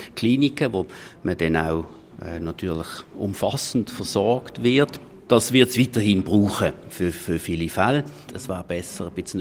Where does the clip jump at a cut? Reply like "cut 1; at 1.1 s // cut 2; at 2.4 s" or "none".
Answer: cut 1; at 8.3 s